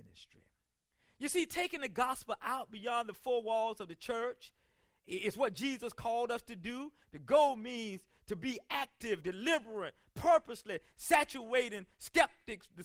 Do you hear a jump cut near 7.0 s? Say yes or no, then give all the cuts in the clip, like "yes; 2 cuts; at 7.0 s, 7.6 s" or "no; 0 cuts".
yes; 2 cuts; at 7.0 s, 9.2 s